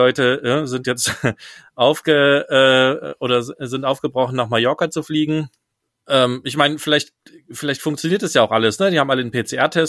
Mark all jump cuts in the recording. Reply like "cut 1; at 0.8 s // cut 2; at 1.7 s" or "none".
none